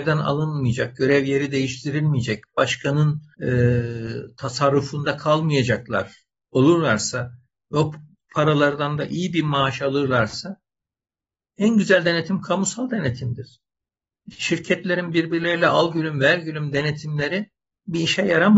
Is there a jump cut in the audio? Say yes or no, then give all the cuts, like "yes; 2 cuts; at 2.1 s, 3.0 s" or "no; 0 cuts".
yes; 1 cut; at 3.3 s